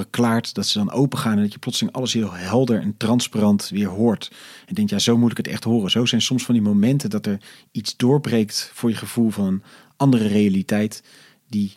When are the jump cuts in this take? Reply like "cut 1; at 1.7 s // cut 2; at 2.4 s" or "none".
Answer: none

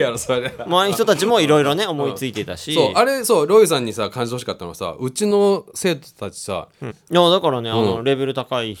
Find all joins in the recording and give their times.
cut 1; at 6.9 s

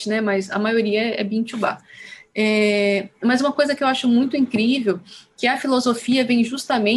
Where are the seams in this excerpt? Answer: none

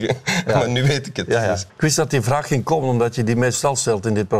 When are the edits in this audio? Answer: cut 1; at 1.7 s

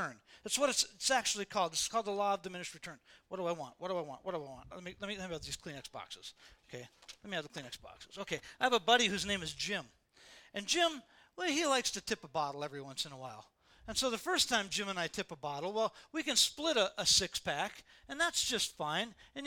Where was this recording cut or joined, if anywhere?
none

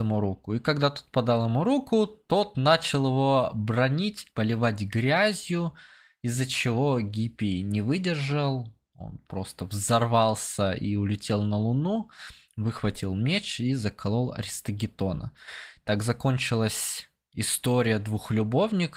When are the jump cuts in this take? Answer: cut 1; at 4.3 s

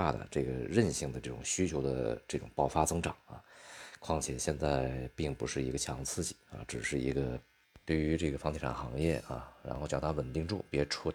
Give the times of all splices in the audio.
none

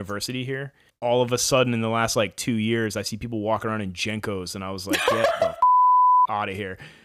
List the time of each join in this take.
none

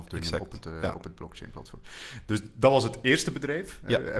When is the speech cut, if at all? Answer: none

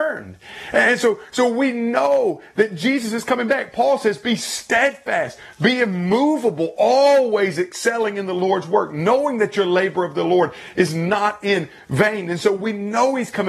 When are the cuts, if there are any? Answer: none

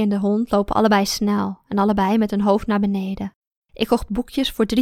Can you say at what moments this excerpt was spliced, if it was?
cut 1; at 3.5 s

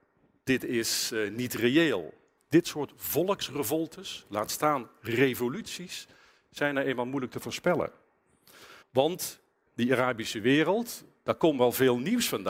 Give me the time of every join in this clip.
cut 1; at 2.4 s // cut 2; at 8.8 s

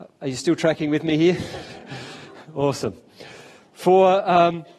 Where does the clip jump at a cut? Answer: none

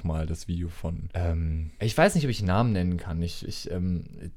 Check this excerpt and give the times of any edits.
none

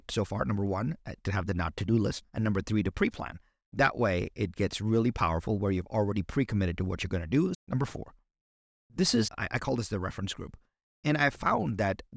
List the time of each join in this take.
cut 1; at 2.2 s // cut 2; at 7.5 s // cut 3; at 9.3 s

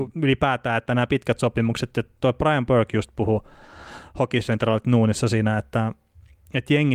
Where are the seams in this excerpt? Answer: none

